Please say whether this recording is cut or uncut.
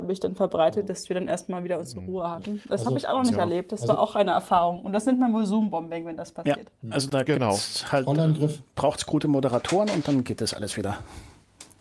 uncut